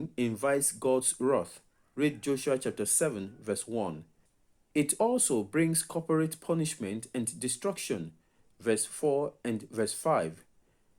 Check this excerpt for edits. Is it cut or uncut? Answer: uncut